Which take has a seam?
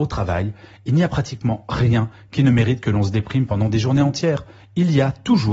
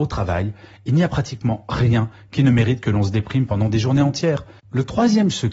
second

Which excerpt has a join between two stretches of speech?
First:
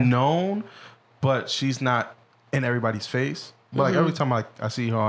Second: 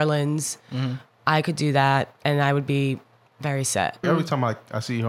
second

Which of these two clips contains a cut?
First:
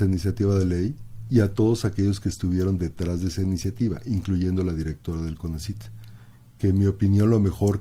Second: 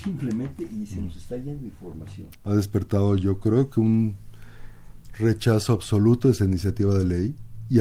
second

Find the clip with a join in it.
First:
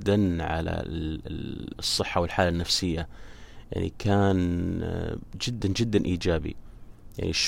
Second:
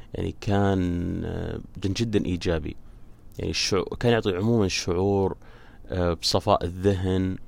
second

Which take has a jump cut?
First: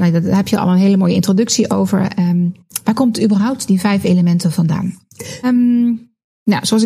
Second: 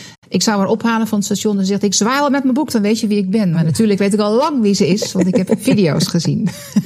first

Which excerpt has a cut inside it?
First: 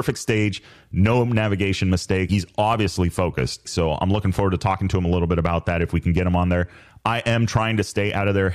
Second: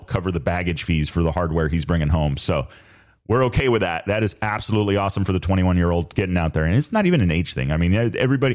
first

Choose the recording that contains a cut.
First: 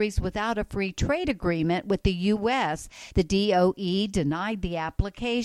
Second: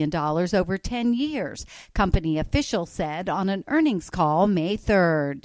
first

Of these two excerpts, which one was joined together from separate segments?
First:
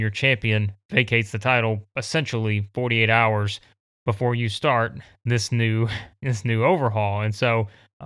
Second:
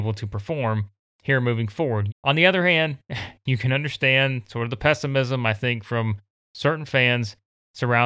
second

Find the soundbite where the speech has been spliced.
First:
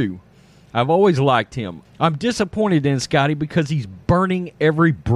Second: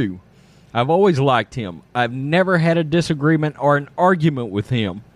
first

